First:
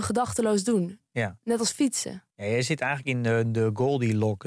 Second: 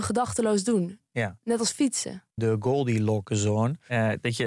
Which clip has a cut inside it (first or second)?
second